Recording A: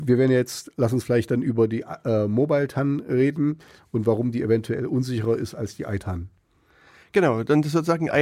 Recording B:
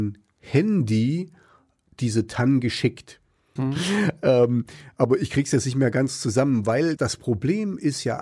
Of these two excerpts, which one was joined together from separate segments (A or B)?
B